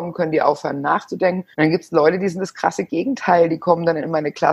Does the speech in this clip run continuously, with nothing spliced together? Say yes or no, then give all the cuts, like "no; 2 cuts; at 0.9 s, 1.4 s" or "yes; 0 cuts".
no; 1 cut; at 1.5 s